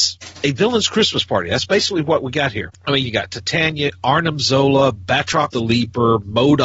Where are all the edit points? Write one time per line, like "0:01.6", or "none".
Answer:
0:03.0